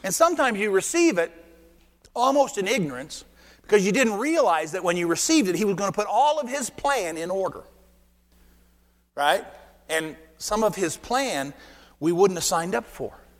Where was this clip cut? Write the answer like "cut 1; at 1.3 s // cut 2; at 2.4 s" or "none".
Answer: none